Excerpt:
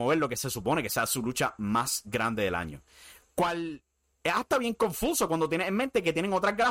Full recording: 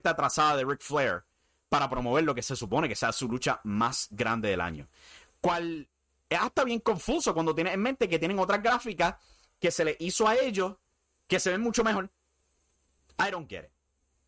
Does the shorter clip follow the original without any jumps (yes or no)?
yes